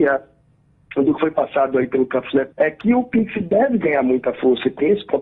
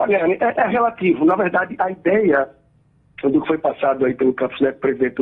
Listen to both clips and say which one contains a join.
first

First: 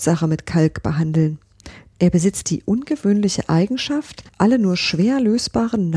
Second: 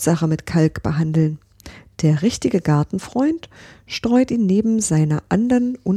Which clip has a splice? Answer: first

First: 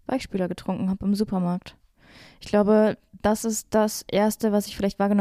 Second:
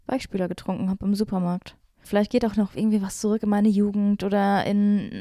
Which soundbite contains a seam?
second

